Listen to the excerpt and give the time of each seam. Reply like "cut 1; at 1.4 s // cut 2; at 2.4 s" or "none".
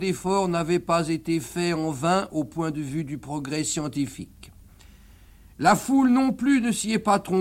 none